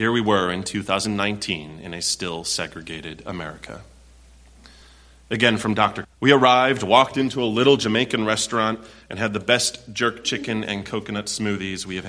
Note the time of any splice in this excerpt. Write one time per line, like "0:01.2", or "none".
0:06.0